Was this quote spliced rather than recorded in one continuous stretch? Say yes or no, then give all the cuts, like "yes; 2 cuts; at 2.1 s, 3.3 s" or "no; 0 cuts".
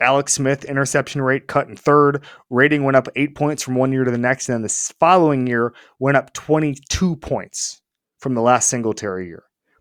no; 0 cuts